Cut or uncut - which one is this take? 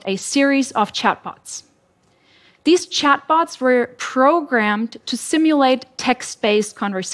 uncut